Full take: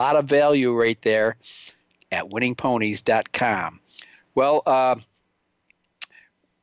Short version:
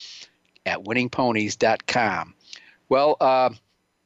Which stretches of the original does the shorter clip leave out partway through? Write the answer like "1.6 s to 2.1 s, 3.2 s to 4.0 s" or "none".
none